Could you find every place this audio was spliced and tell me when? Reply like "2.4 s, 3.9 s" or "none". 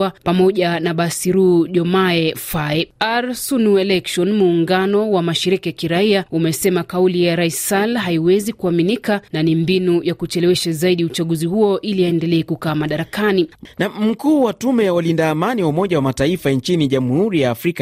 none